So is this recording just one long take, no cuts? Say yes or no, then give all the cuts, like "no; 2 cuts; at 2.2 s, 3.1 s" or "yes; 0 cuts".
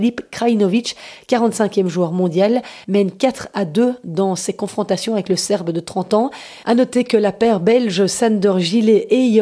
no; 2 cuts; at 2.8 s, 6.6 s